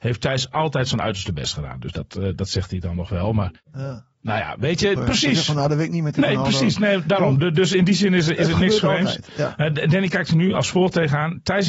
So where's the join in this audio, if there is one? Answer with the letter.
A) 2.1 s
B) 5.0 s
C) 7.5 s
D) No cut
B